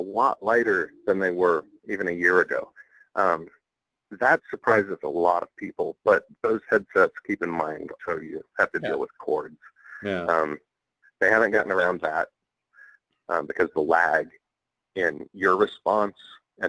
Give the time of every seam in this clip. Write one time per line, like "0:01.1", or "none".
0:08.0